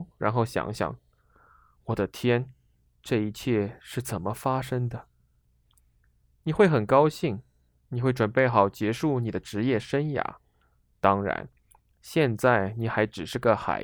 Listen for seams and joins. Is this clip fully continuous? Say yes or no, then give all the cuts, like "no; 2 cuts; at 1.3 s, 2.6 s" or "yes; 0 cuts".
yes; 0 cuts